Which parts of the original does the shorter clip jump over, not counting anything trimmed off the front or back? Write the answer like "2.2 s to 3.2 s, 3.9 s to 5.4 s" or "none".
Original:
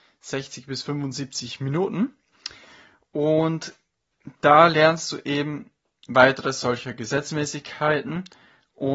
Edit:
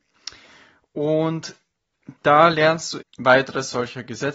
5.2 s to 5.9 s